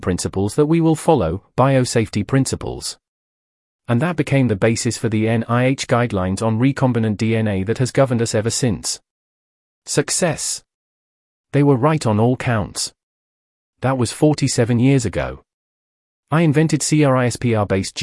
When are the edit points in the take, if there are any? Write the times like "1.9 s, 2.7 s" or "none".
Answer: none